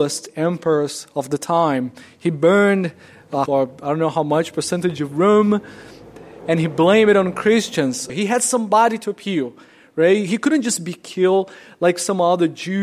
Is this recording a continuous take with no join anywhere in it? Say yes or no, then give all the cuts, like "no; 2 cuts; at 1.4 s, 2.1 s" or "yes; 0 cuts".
no; 2 cuts; at 3.5 s, 8.1 s